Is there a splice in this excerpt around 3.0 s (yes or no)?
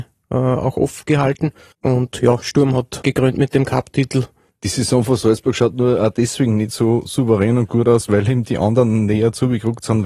yes